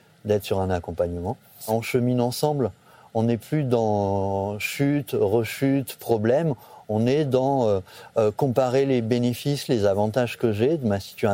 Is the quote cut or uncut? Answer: uncut